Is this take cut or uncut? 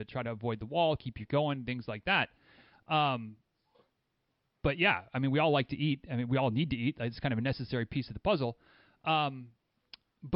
uncut